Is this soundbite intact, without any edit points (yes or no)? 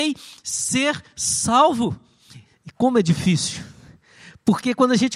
no